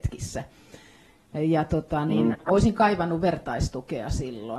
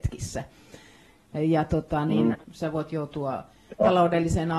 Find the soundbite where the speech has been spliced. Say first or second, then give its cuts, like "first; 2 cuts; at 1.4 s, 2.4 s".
second; 1 cut; at 2.4 s